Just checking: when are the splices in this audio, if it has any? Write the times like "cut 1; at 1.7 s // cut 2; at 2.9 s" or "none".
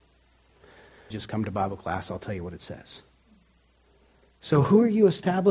cut 1; at 1.1 s